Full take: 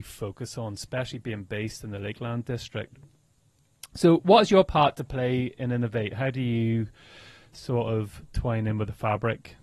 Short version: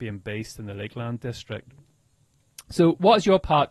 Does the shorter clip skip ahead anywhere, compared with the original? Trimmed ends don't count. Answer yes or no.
no